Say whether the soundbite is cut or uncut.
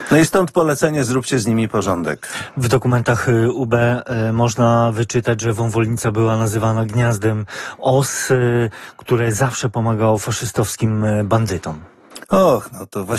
uncut